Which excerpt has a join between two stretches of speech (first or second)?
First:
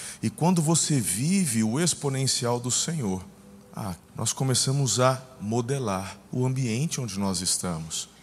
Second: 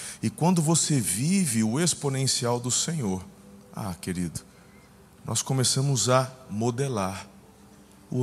first